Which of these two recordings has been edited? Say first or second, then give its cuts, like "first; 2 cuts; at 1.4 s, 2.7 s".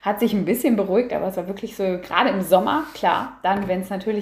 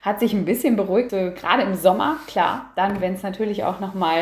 second; 1 cut; at 1.1 s